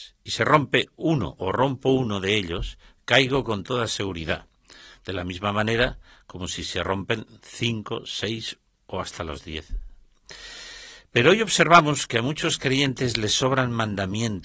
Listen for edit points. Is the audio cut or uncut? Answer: uncut